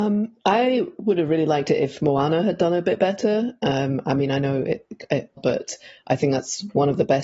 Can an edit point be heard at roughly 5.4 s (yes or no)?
yes